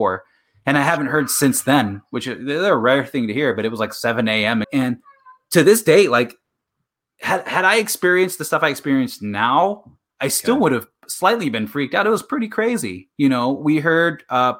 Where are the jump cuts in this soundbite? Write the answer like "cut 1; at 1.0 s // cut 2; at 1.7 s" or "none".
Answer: cut 1; at 4.6 s